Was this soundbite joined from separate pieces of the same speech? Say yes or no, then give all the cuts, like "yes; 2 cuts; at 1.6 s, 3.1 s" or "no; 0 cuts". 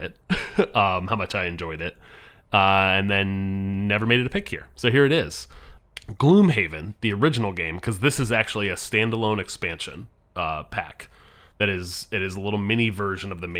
no; 0 cuts